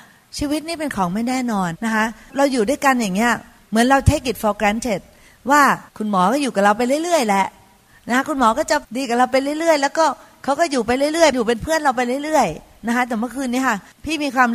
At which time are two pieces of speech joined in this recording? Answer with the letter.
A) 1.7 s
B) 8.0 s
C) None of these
A